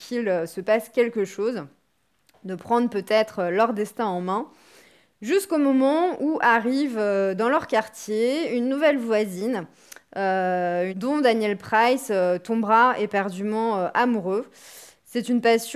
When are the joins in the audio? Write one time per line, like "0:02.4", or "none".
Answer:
0:10.9